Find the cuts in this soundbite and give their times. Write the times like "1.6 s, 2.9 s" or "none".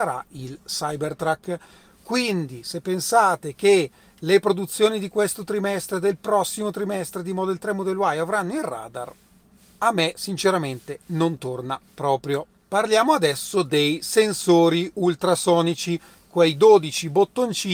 none